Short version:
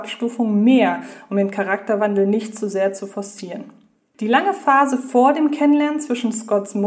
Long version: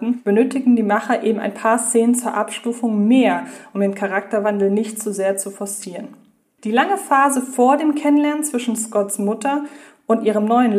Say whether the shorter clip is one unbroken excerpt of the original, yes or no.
yes